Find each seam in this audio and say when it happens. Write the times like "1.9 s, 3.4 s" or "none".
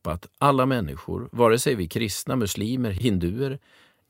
none